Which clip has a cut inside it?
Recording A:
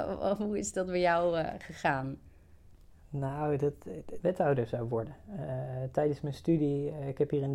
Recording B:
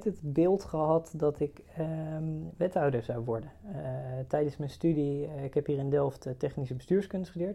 A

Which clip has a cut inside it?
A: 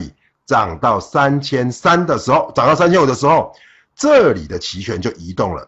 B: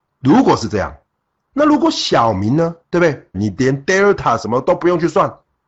B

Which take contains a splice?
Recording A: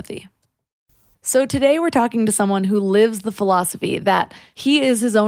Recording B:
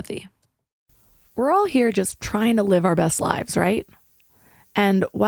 A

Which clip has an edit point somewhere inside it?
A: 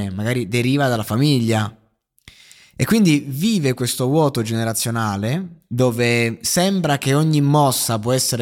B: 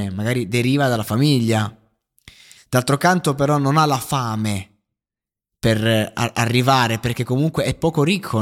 B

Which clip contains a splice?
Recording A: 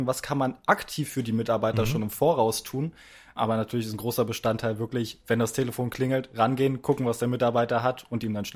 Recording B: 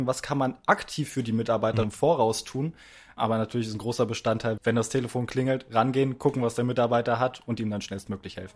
B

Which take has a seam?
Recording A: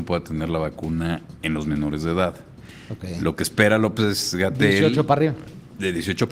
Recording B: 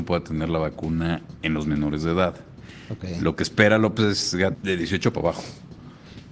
B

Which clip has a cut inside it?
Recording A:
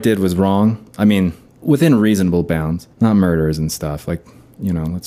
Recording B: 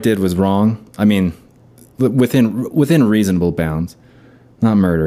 A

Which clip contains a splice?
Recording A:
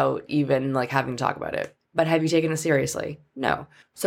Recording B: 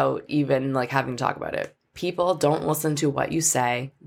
A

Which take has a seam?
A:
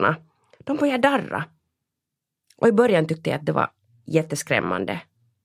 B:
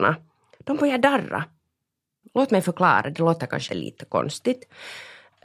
B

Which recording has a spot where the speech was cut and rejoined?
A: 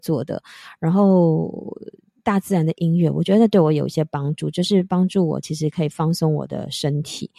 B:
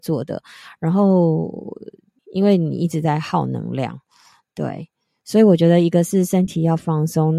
B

